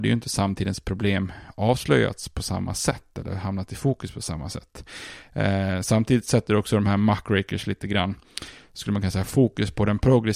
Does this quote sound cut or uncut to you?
uncut